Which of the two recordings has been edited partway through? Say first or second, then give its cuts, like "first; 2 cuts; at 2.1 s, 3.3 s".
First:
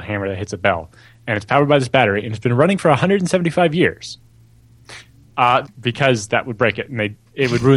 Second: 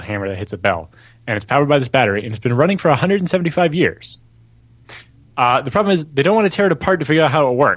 first; 1 cut; at 5.6 s